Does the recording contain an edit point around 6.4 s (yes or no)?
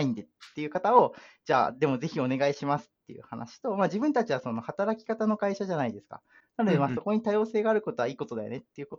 no